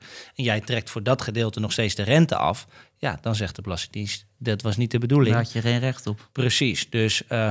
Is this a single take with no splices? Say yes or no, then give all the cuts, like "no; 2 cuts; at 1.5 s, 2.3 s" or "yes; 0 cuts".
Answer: yes; 0 cuts